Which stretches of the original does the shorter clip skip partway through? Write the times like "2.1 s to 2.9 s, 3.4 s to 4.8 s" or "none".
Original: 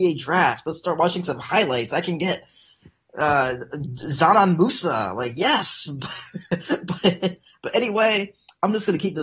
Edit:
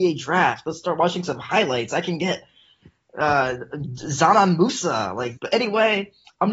5.3 s to 7.6 s

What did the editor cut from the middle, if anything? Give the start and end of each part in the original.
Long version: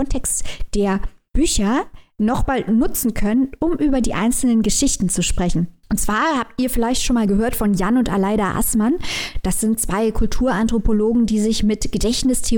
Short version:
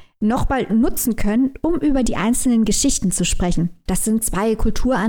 5.8 s to 9.4 s

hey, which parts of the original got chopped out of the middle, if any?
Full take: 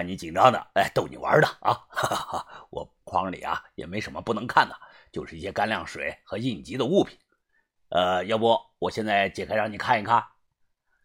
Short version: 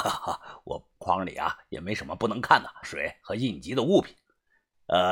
4.9 s to 5.8 s

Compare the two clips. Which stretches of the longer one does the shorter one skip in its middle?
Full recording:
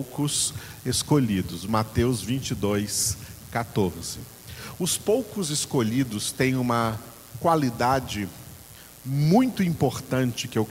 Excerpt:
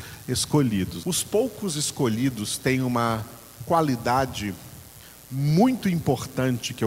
1.6 s to 4.8 s

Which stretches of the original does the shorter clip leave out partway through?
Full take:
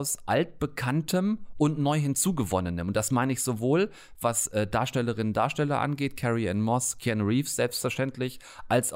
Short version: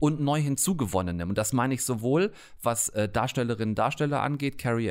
none

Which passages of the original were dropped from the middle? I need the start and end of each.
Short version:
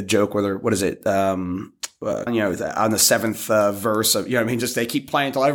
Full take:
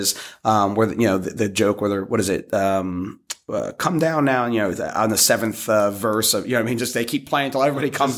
3.7 s to 4.5 s

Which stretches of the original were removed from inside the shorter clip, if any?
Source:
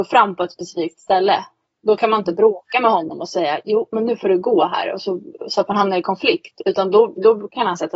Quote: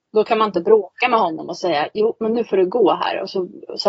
none

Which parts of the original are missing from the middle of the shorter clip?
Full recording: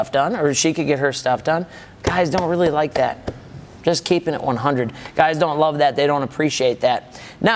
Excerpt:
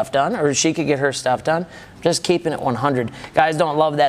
2.0 s to 3.8 s

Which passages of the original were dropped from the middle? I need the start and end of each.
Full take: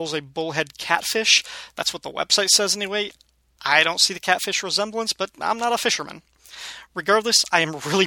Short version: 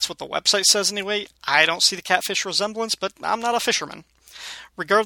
3.2 s to 3.5 s

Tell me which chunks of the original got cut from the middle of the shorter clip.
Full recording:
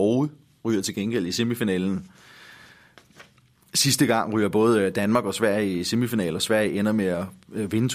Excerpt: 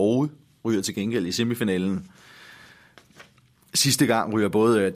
none

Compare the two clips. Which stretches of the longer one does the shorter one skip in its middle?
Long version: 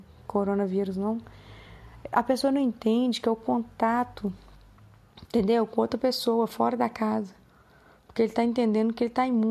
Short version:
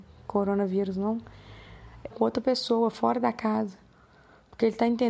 2.1 s to 5.7 s

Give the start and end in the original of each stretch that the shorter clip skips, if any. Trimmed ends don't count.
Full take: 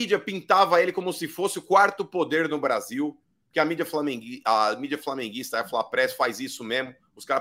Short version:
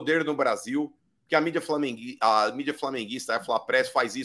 none

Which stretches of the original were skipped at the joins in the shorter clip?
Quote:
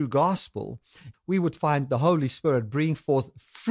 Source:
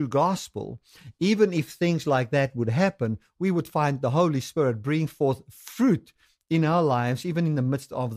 1.1 s to 3.3 s

